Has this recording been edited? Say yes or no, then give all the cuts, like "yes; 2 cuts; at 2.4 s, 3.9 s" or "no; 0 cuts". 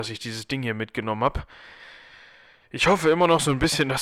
no; 0 cuts